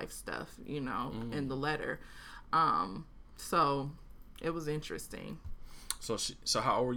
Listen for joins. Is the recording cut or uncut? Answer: uncut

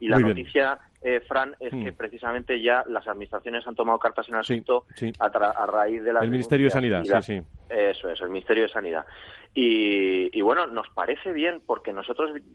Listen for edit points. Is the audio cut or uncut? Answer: uncut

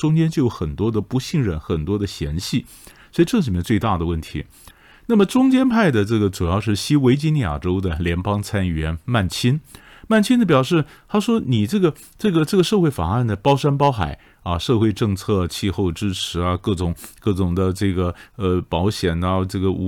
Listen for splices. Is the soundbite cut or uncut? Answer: uncut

